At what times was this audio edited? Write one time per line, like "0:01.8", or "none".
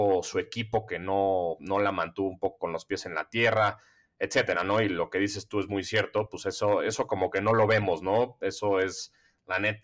none